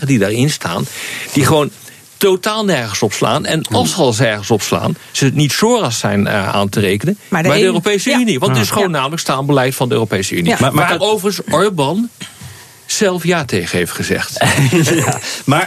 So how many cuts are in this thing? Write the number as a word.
zero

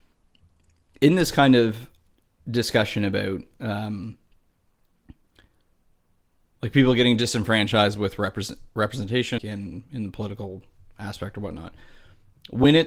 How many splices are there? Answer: one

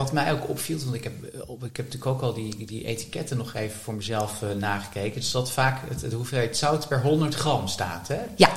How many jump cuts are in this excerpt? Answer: zero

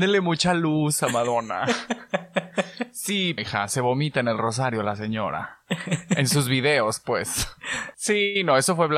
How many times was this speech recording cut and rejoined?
two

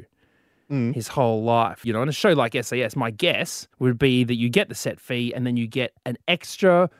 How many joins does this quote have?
two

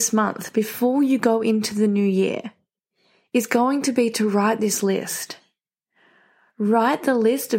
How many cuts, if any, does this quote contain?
zero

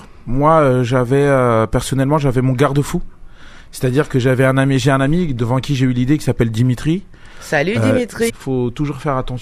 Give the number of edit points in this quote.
one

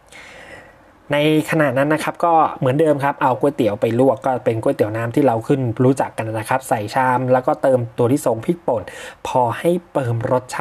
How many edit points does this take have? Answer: zero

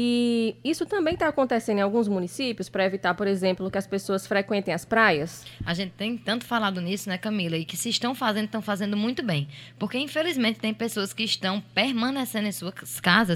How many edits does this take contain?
zero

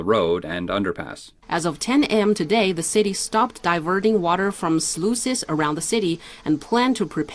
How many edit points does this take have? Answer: one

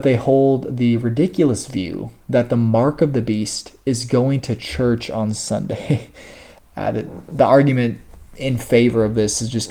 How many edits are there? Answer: one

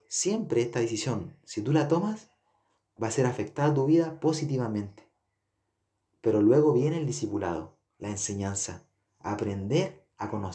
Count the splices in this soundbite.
one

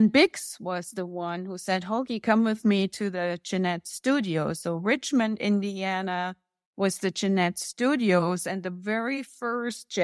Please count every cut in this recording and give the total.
zero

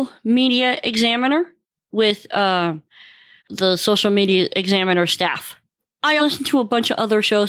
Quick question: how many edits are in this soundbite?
two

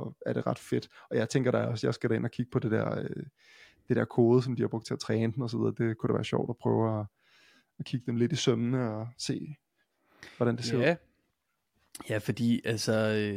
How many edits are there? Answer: zero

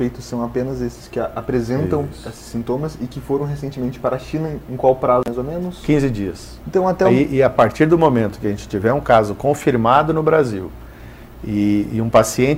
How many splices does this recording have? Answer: one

